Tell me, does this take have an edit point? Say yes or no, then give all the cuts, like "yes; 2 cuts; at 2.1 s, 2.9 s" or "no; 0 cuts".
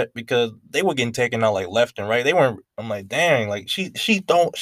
yes; 1 cut; at 2.6 s